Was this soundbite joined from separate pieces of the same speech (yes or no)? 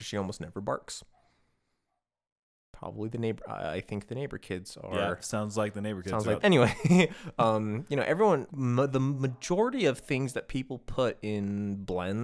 yes